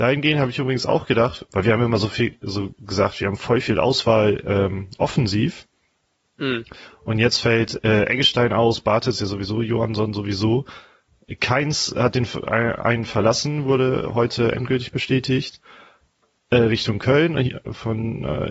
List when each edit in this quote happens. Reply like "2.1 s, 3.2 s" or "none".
1.5 s